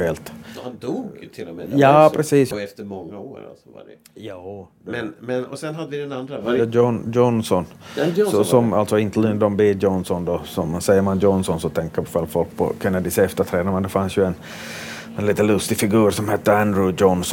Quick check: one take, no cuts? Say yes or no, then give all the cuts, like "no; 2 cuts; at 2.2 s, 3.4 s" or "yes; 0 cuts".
no; 1 cut; at 2.5 s